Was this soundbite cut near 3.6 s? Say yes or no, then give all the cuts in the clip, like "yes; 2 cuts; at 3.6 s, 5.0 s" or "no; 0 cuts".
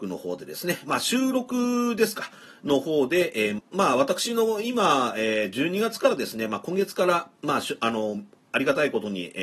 yes; 1 cut; at 3.6 s